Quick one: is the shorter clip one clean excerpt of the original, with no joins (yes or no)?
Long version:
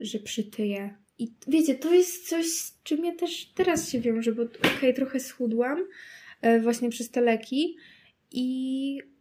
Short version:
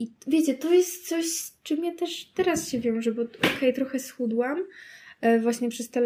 yes